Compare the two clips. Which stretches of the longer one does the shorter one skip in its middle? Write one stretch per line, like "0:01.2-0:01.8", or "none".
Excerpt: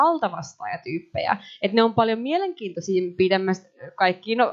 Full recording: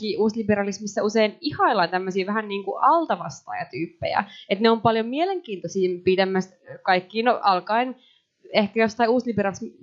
none